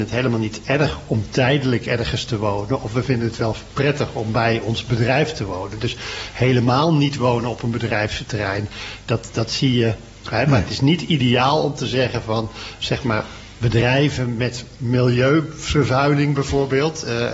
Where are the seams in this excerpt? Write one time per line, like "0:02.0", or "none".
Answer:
0:10.3
0:12.8